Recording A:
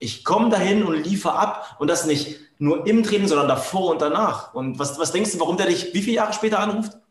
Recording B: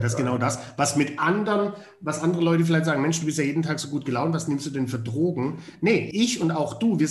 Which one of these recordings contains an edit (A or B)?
B